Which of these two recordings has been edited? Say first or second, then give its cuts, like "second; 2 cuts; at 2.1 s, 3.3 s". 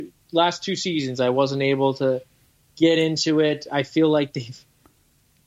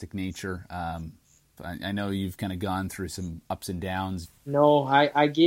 second; 2 cuts; at 1.6 s, 4.3 s